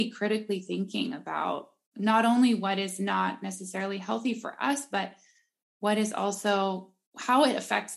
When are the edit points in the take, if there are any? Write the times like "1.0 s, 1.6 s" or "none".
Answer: none